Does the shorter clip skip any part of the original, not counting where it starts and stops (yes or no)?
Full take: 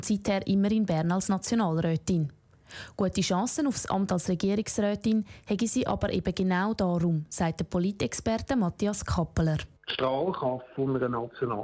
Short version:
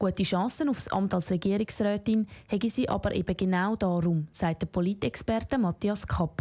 no